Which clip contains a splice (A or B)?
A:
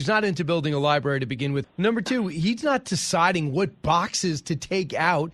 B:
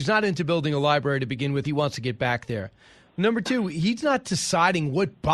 A